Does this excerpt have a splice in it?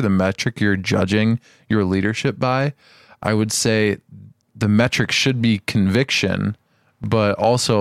no; 0 cuts

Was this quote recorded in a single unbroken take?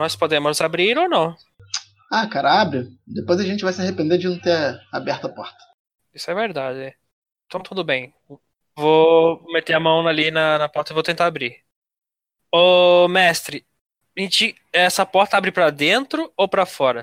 no; 1 cut; at 12.4 s

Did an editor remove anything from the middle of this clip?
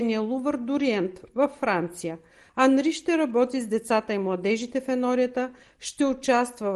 no; 0 cuts

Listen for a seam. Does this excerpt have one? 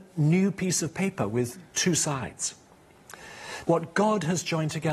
yes; 1 cut; at 3.6 s

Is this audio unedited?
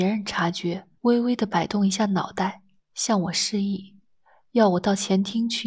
yes; 0 cuts

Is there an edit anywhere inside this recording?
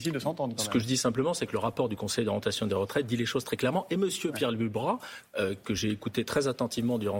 no; 0 cuts

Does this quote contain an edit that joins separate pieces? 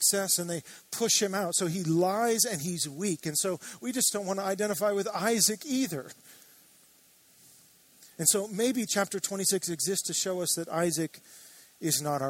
no; 0 cuts

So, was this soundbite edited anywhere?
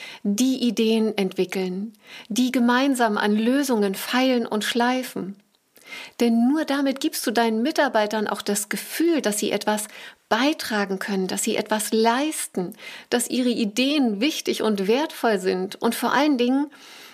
no; 0 cuts

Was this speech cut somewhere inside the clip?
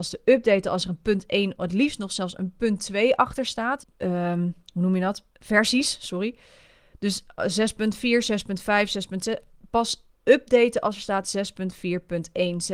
yes; 3 cuts; at 3.8 s, 5.3 s, 10.2 s

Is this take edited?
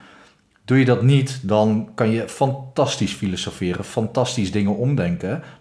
no; 0 cuts

